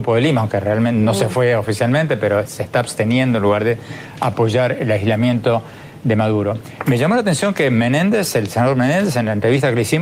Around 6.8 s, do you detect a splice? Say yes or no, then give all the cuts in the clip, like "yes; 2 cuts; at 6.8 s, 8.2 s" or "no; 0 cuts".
no; 0 cuts